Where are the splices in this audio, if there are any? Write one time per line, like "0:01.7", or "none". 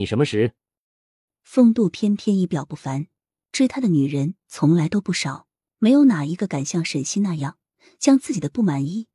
0:01.3